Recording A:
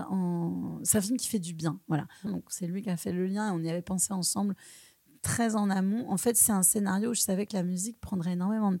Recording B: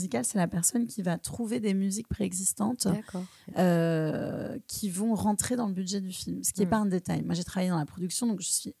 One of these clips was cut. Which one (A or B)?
A